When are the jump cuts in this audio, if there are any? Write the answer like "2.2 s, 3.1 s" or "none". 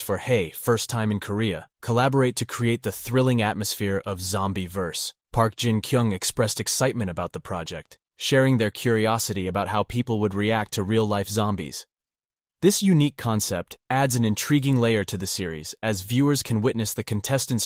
1.7 s, 5.2 s